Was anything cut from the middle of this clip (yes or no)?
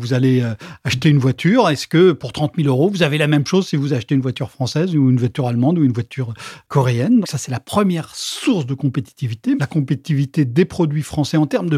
yes